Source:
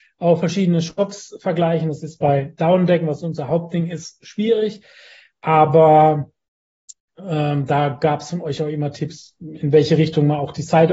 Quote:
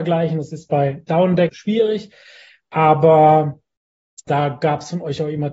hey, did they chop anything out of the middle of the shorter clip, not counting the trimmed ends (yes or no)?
yes